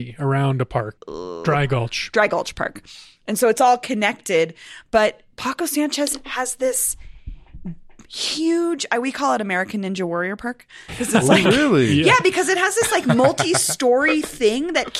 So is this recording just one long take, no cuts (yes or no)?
no